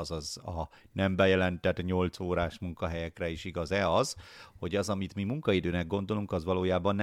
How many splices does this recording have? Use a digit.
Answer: 0